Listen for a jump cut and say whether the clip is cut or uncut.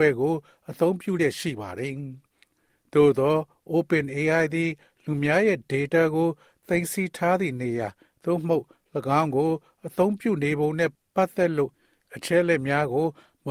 uncut